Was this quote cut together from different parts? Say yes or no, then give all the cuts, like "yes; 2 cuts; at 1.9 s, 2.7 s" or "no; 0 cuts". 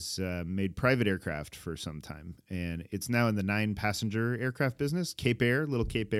no; 0 cuts